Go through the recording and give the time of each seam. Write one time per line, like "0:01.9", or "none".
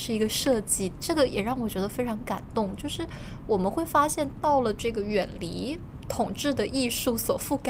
none